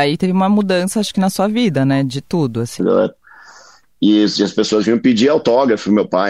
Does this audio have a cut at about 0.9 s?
no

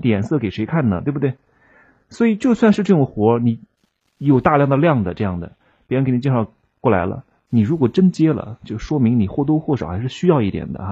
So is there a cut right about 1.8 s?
no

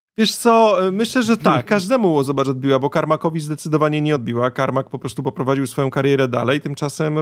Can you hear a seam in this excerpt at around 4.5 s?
no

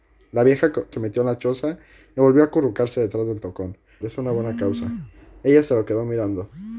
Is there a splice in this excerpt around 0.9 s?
yes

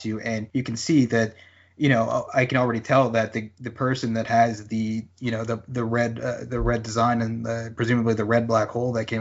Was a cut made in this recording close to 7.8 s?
no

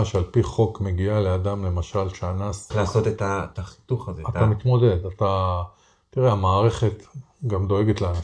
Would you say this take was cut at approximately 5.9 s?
no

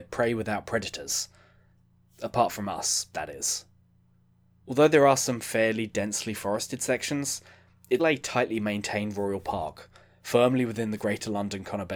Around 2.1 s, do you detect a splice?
no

